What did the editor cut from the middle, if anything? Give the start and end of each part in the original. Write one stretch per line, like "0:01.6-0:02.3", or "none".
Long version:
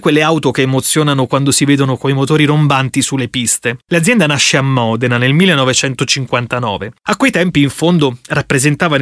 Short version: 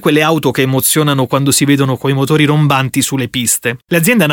none